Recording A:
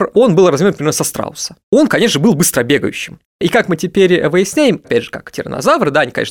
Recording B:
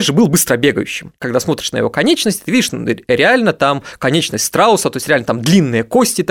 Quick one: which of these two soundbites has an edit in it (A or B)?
A